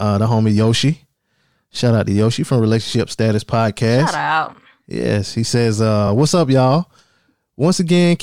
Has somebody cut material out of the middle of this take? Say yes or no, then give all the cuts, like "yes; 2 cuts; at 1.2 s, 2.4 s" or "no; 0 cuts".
no; 0 cuts